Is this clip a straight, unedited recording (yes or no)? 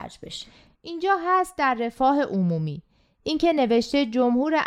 yes